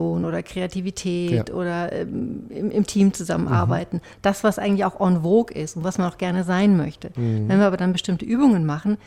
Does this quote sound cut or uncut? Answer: uncut